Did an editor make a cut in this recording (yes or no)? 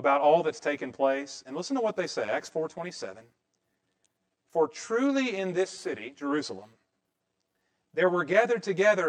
no